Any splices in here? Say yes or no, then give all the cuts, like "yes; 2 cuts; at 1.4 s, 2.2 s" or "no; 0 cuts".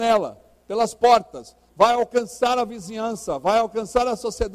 yes; 1 cut; at 1.7 s